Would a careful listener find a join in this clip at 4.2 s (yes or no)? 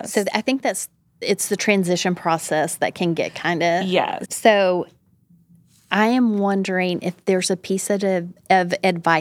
yes